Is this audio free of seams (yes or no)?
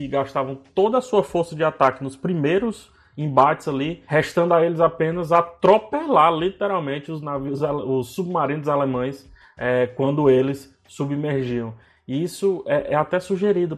yes